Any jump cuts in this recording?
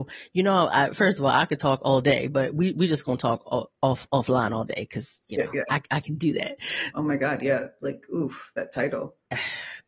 yes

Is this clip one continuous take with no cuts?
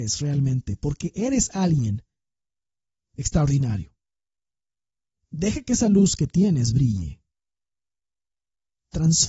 yes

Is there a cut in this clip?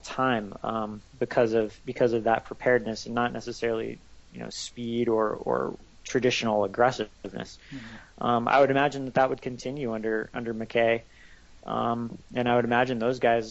no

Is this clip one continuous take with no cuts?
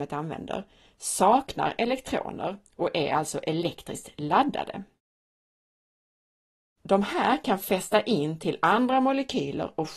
yes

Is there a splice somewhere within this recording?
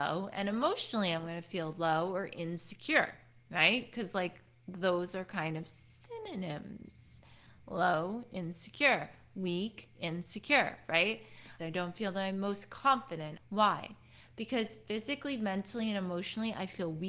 yes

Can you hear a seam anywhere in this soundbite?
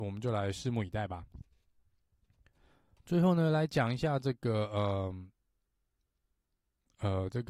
no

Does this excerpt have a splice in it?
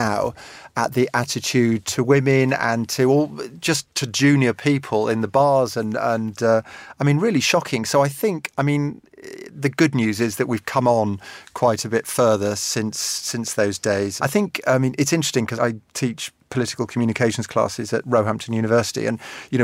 yes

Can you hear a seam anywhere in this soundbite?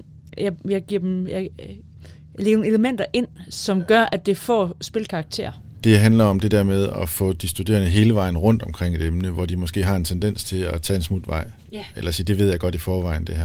no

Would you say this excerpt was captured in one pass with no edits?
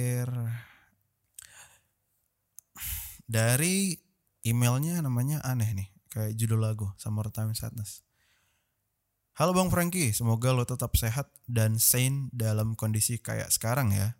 yes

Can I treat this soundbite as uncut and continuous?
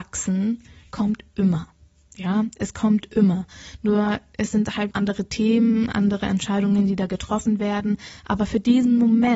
no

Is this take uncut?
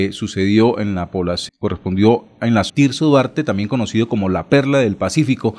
no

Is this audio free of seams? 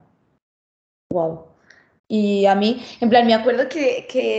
no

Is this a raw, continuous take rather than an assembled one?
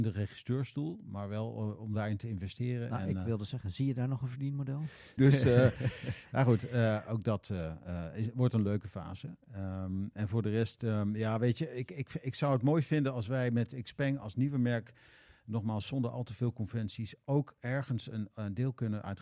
no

